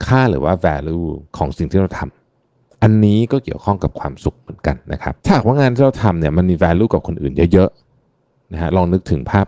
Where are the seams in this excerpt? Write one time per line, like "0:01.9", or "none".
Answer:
0:01.3
0:05.2